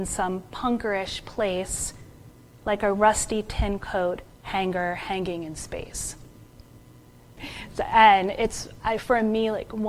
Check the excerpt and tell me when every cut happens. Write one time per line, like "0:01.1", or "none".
0:04.3
0:07.4